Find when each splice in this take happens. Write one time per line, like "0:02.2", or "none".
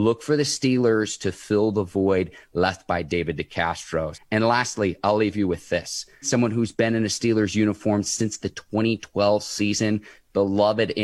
0:04.1
0:06.2

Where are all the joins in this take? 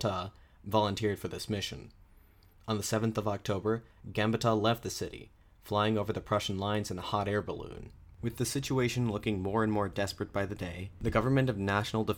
0:08.2

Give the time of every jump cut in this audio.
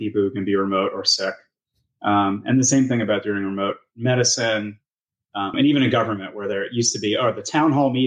0:05.5

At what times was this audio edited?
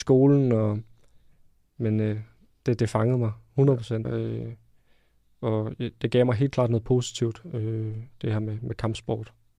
0:04.0

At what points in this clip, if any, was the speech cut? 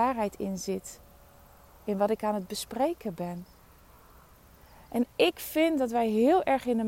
none

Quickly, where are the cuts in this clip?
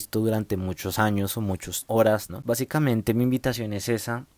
0:02.3

